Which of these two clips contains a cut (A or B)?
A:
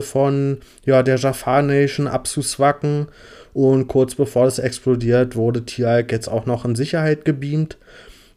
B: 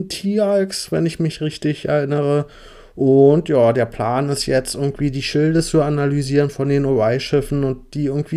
A